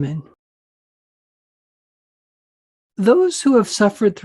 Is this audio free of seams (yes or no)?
yes